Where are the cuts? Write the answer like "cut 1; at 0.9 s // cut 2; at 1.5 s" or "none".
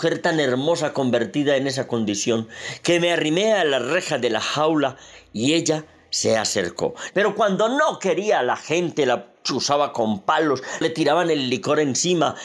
cut 1; at 7.1 s // cut 2; at 10.8 s